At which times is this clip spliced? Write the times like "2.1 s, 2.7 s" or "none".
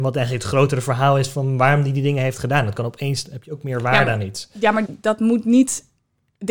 4.9 s

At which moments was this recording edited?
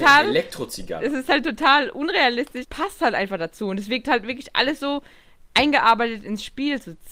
2.6 s

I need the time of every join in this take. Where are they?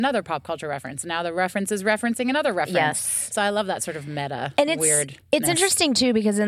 none

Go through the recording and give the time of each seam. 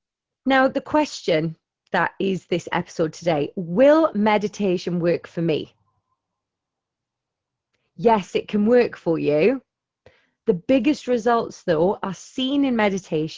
none

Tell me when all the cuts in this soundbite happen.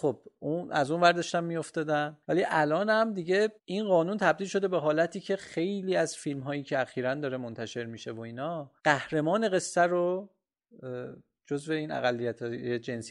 2.2 s, 3.6 s, 8.8 s

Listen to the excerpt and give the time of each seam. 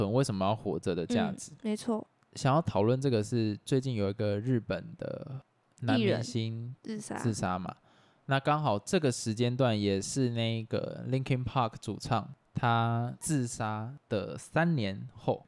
none

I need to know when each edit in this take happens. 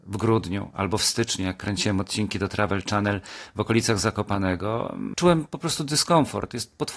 5.1 s

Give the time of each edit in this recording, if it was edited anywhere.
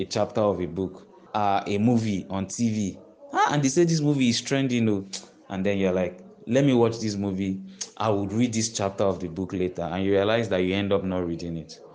1.3 s

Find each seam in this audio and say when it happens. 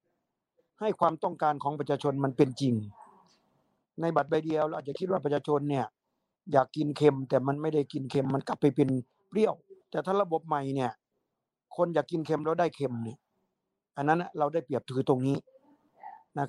9.8 s

